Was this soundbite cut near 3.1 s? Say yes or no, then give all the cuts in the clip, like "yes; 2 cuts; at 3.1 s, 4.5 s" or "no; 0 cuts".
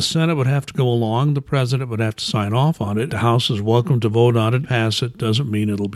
yes; 2 cuts; at 3.1 s, 4.6 s